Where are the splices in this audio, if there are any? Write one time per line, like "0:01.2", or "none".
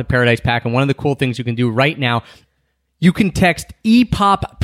none